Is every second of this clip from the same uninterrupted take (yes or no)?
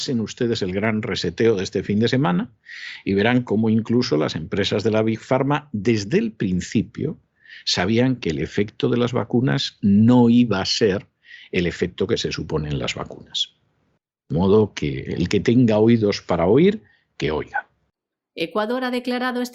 yes